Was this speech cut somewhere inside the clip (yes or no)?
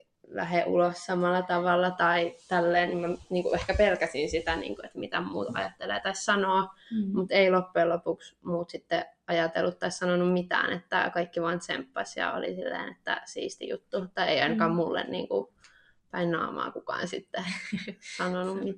no